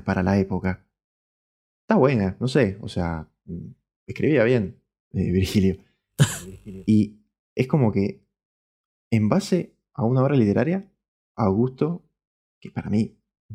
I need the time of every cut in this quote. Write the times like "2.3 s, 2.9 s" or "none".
none